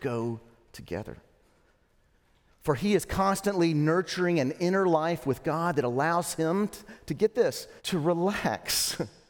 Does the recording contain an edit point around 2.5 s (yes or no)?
yes